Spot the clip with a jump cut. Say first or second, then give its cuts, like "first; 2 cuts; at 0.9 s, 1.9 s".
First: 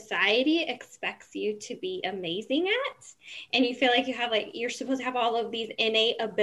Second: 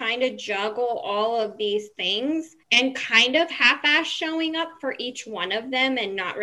second; 1 cut; at 2.6 s